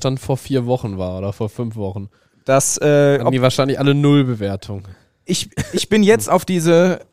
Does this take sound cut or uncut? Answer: uncut